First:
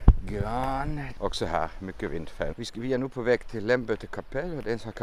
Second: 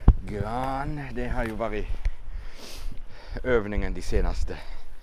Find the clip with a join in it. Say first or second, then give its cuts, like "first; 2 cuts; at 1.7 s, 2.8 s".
first; 2 cuts; at 1.1 s, 2.5 s